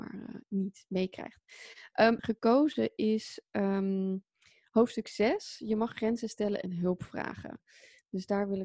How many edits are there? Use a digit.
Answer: 1